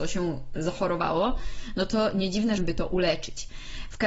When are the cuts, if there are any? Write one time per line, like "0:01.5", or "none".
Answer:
0:02.6